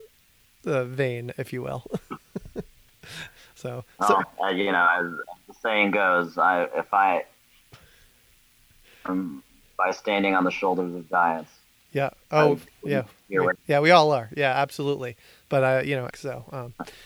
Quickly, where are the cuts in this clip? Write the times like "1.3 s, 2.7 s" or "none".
13.6 s, 16.1 s